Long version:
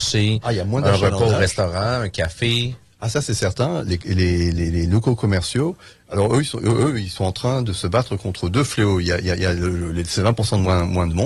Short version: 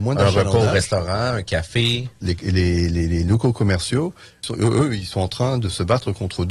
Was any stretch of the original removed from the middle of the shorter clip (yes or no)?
yes